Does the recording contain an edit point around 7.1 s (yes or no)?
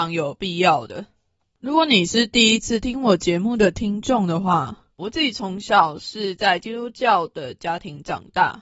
no